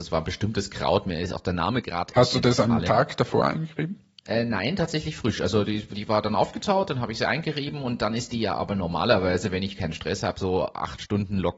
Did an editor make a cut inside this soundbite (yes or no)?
no